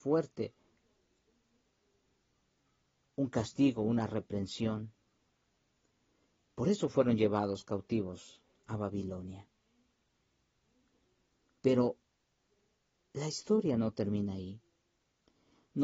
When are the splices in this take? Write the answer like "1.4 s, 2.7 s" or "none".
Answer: none